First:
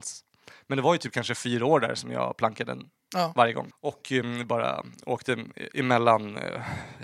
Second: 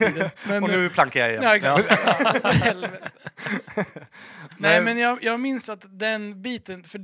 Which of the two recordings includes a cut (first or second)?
first